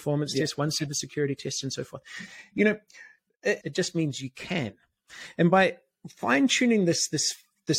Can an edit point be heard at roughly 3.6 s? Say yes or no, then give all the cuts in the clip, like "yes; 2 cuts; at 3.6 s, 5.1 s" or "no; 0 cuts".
yes; 1 cut; at 3.6 s